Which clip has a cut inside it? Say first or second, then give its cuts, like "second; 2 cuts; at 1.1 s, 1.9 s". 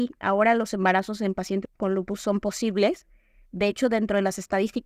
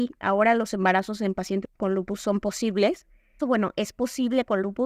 second; 1 cut; at 3.4 s